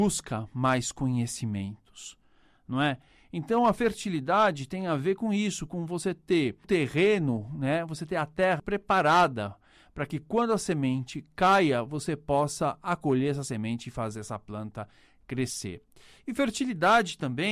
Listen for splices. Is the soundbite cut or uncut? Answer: cut